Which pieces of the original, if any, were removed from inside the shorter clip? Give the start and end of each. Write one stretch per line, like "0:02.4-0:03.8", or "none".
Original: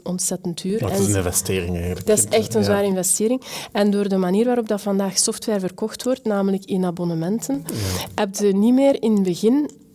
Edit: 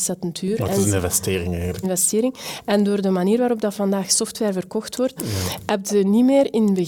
0:02.0-0:02.9
0:06.2-0:07.6